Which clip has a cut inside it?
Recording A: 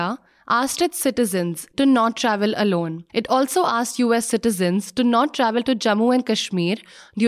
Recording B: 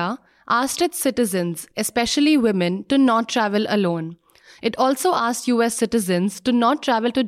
A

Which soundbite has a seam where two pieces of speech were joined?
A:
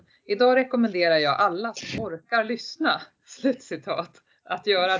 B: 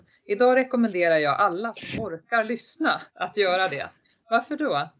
B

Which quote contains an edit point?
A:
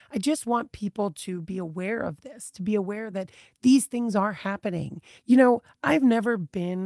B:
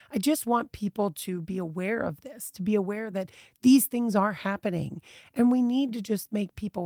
A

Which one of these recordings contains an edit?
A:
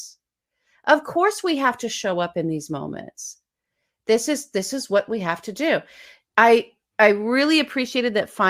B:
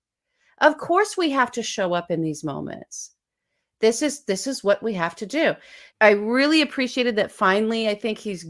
B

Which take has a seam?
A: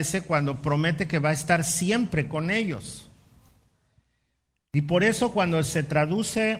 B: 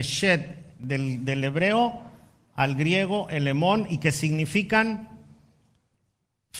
A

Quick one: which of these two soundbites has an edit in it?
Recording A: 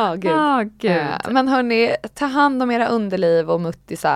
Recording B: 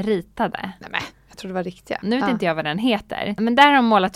B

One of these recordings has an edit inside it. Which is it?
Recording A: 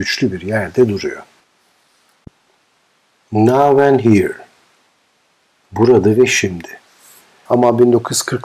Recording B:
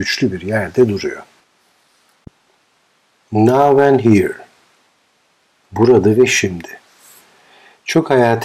A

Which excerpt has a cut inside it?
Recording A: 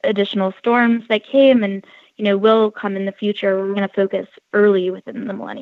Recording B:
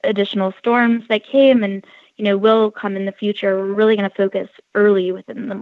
A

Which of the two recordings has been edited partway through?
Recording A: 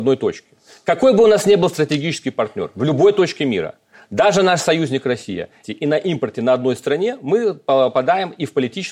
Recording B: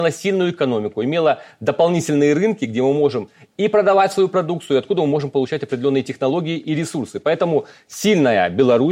A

